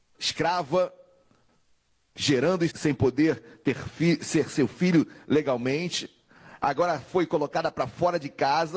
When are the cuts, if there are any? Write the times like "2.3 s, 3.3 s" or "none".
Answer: 2.7 s